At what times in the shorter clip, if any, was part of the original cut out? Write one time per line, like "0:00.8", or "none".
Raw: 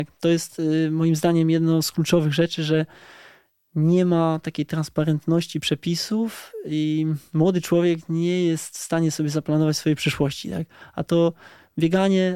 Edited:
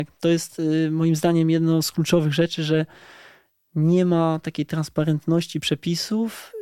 none